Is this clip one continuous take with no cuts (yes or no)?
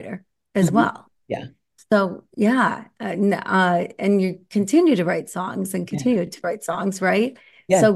yes